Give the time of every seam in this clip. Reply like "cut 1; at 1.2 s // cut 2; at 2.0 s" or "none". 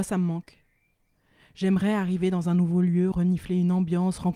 none